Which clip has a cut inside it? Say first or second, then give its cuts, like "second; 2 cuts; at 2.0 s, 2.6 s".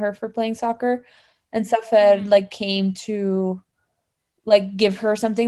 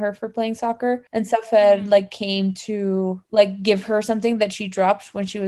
second; 2 cuts; at 1.1 s, 3.2 s